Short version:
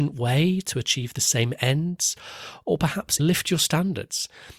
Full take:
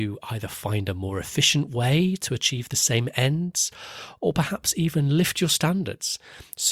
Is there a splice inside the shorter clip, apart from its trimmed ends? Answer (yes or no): yes